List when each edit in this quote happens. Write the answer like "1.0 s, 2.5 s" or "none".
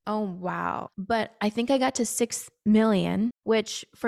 0.9 s